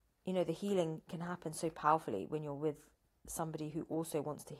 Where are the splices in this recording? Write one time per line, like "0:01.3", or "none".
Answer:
none